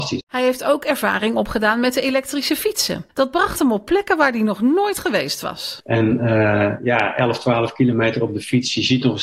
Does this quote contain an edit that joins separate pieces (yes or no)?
yes